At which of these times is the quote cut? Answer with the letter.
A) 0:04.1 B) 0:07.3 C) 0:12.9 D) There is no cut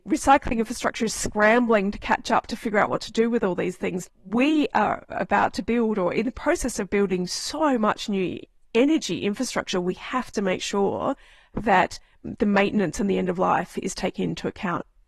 A